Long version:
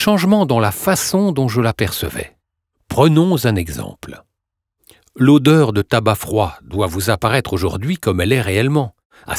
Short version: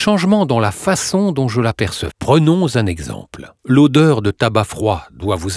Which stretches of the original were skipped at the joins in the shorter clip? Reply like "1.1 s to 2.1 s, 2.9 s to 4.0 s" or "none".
2.1 s to 2.8 s, 4.3 s to 5.1 s

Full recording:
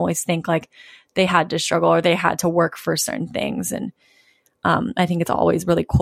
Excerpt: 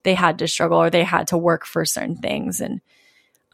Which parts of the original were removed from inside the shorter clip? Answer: none

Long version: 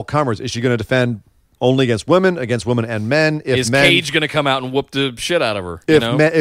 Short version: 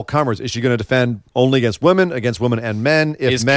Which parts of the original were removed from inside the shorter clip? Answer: 1.3 s to 1.5 s

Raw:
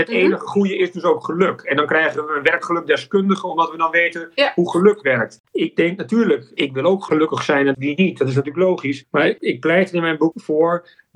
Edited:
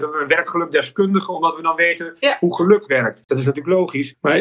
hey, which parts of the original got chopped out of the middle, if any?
5.4 s to 8.2 s

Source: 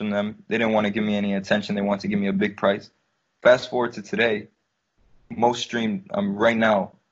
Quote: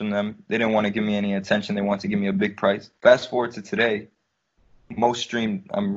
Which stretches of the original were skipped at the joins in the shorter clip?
3.0 s to 3.4 s

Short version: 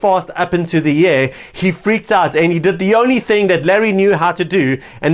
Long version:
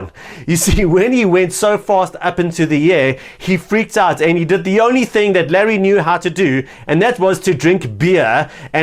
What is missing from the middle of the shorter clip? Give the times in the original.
none

